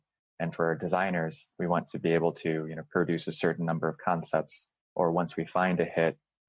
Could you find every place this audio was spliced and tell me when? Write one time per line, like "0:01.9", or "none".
none